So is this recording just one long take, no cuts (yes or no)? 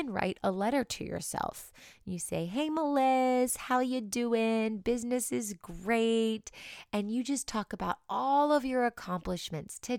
yes